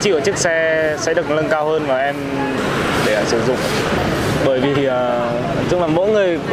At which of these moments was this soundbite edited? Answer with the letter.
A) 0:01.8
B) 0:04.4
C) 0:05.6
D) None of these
D